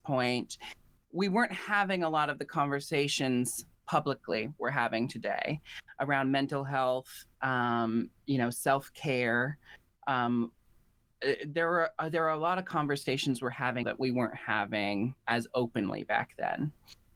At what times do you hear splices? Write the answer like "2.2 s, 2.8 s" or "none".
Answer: 7.3 s, 13.8 s